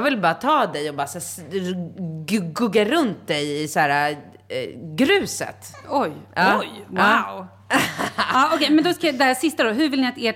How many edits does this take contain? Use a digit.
0